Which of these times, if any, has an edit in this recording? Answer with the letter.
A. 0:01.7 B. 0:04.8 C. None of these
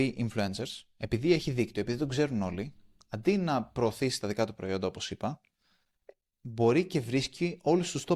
C